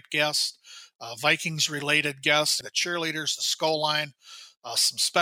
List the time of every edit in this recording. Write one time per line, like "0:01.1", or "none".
0:02.6